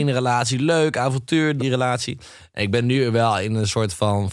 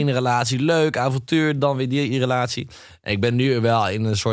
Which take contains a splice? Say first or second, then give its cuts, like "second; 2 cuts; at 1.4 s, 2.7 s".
first; 1 cut; at 1.6 s